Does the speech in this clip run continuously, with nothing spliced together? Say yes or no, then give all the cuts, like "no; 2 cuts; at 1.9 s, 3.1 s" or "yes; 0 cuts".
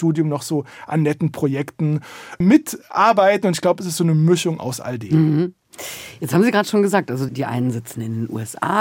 yes; 0 cuts